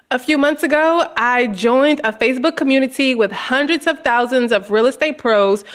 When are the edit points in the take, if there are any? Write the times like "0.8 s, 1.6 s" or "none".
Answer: none